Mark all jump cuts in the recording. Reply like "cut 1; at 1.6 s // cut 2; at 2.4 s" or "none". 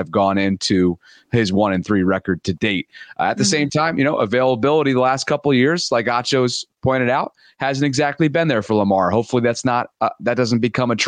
none